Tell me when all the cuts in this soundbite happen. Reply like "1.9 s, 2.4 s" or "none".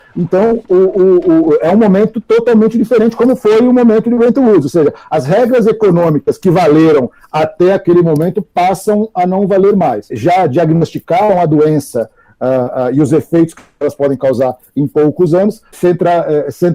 10.1 s, 15.7 s